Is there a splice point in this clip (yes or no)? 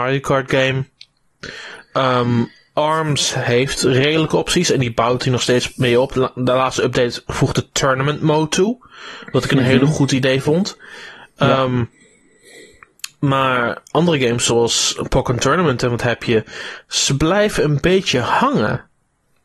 no